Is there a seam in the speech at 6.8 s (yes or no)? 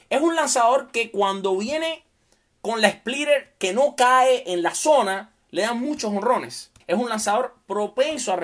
yes